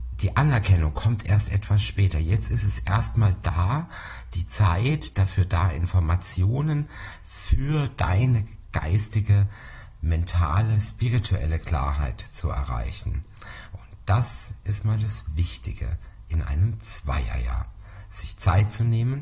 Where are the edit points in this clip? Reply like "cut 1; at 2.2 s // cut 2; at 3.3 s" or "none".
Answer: none